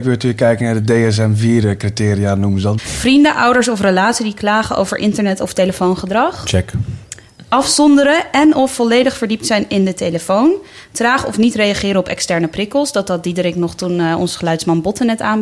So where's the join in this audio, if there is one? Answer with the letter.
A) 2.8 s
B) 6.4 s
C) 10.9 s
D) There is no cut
A